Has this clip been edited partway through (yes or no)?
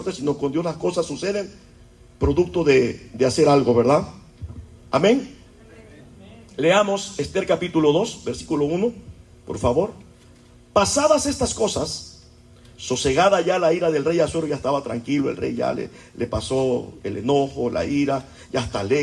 no